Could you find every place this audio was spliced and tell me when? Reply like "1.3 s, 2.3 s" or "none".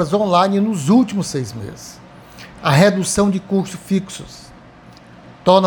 2.6 s